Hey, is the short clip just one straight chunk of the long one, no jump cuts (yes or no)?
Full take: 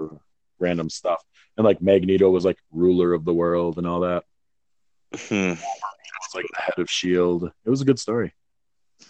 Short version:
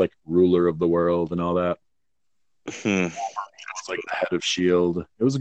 yes